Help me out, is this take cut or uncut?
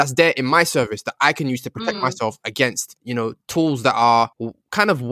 uncut